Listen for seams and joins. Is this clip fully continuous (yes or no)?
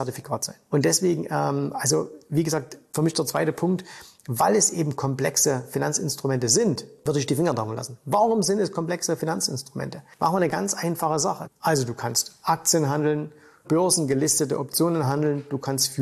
no